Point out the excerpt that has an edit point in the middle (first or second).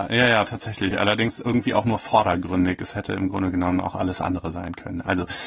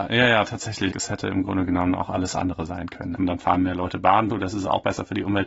second